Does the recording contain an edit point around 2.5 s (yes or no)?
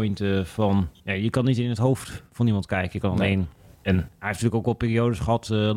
no